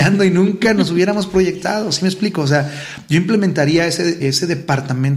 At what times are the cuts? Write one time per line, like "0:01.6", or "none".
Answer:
0:04.2